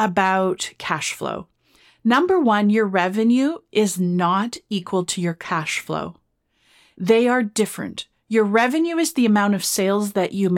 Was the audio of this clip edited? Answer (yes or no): no